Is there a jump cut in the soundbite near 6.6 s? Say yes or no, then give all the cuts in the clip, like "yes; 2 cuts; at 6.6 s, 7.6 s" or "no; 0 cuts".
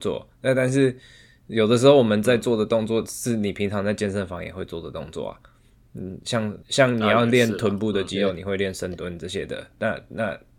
yes; 1 cut; at 6.6 s